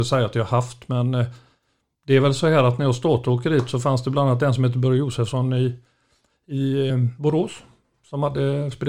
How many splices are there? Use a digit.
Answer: 1